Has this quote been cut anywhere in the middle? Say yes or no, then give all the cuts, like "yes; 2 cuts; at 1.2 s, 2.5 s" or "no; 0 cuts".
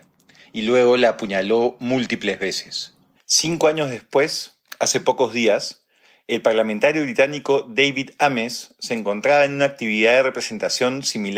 yes; 1 cut; at 3.2 s